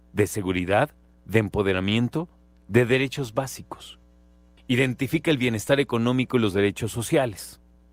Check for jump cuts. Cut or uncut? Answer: cut